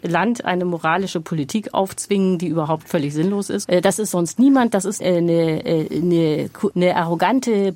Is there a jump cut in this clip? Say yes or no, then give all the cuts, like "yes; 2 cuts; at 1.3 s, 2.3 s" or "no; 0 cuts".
yes; 3 cuts; at 3.6 s, 5.0 s, 6.7 s